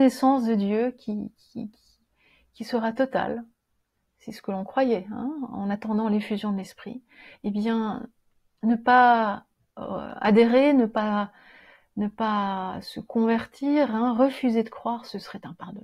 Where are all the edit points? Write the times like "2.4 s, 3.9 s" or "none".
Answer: none